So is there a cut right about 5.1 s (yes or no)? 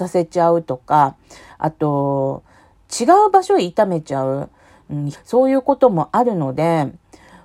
yes